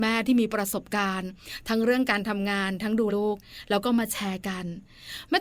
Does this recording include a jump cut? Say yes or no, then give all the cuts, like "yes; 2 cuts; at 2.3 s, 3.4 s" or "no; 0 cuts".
yes; 1 cut; at 3.1 s